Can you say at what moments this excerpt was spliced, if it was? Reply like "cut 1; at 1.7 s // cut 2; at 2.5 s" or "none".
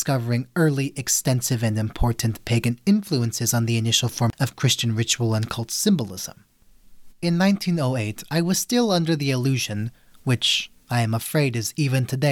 none